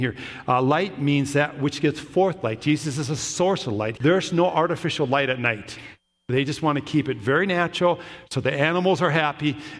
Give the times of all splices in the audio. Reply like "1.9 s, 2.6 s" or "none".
4.0 s